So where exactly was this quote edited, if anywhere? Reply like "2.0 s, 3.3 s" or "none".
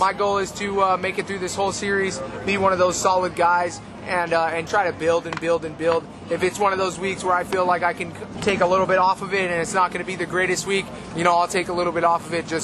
4.7 s, 8.3 s